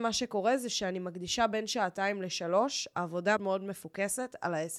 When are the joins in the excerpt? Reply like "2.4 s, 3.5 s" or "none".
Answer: 3.4 s